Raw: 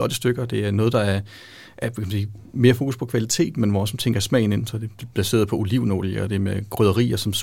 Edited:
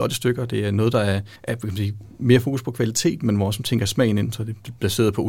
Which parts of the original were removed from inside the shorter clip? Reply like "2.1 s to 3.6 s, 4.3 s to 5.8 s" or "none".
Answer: 1.3 s to 1.7 s